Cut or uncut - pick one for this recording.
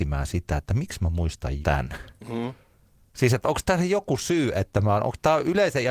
cut